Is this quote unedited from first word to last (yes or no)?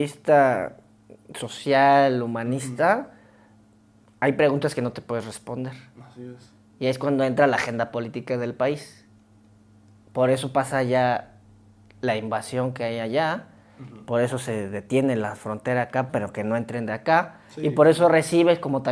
no